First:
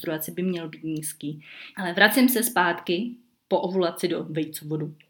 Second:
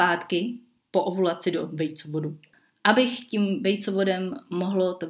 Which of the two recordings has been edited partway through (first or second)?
first